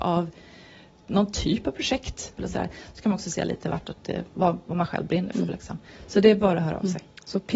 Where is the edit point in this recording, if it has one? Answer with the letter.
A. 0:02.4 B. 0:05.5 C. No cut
A